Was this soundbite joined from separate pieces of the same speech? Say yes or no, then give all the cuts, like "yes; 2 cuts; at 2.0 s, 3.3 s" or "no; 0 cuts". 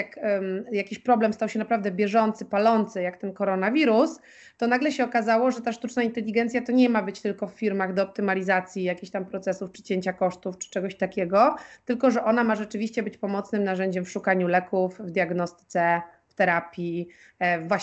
no; 0 cuts